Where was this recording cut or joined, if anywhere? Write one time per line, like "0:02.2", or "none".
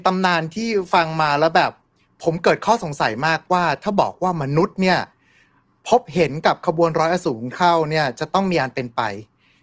none